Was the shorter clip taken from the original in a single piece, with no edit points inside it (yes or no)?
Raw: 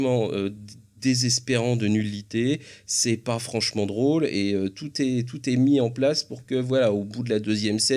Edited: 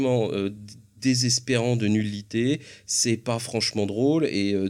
yes